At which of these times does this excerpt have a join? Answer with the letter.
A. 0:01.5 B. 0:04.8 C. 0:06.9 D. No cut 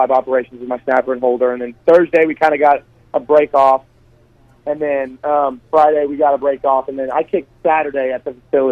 D